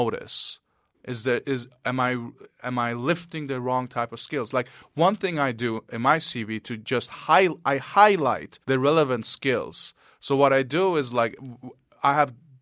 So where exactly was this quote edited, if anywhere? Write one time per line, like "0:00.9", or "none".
0:00.9
0:08.6